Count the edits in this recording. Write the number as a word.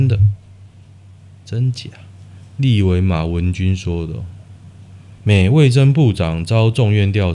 one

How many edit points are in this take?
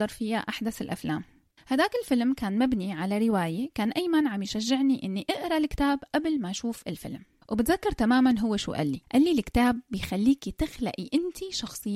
one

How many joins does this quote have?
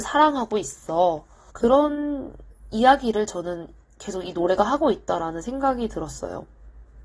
one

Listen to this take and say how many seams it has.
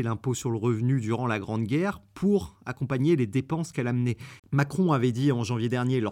one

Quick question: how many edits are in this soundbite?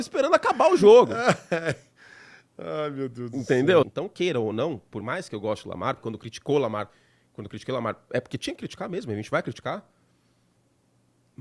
two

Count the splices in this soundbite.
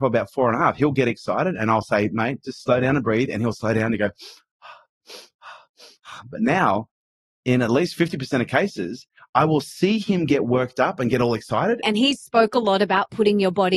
one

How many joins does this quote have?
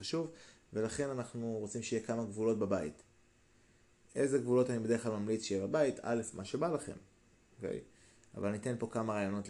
zero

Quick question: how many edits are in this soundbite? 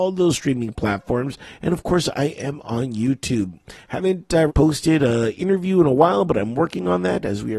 one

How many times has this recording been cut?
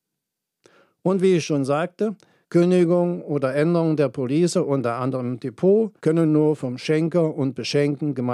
two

